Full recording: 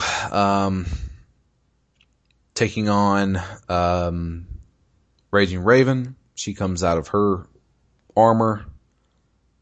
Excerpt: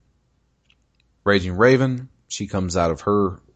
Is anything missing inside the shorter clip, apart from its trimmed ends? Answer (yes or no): yes